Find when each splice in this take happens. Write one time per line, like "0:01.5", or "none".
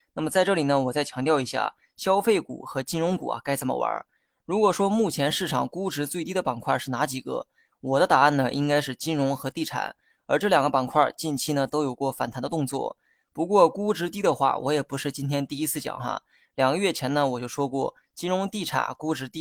none